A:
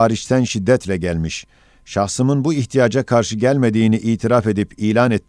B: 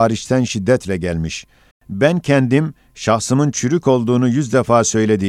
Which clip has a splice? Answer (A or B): B